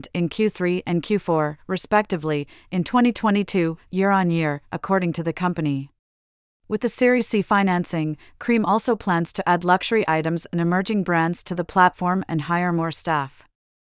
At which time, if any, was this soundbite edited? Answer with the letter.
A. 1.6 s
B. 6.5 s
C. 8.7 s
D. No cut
B